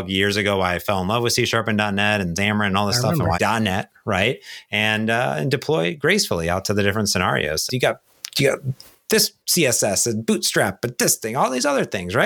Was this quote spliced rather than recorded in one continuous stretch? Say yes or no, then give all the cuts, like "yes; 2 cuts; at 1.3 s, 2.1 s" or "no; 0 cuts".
yes; 2 cuts; at 3.3 s, 7.7 s